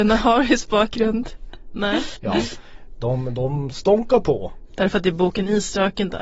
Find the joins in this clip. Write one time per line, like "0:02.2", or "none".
0:02.2
0:04.7